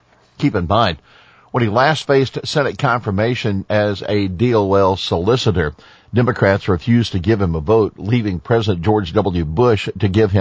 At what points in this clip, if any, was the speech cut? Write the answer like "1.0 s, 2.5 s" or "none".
none